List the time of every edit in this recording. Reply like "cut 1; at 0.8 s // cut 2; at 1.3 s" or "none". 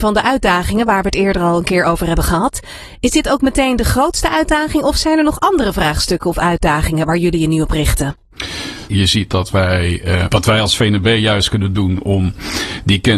cut 1; at 8.9 s // cut 2; at 10.3 s